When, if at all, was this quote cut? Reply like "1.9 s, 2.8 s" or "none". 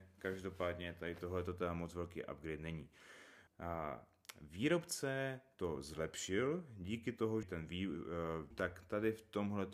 3.5 s, 7.4 s, 8.5 s